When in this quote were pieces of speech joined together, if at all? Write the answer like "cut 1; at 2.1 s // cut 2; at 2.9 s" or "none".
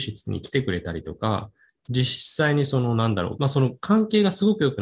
cut 1; at 3.4 s